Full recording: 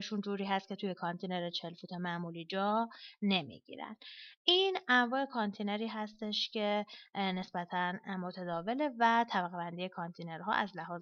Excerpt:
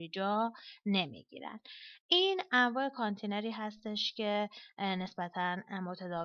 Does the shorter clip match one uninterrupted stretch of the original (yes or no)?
yes